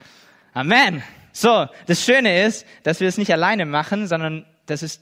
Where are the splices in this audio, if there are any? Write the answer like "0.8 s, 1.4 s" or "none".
1.3 s